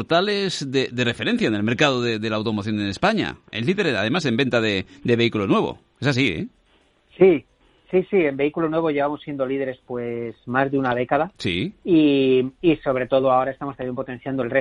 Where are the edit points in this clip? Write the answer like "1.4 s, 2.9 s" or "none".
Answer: none